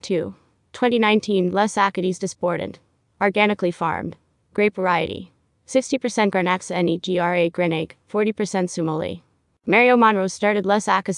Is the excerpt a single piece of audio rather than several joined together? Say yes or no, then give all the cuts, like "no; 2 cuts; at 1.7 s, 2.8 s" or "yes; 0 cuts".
yes; 0 cuts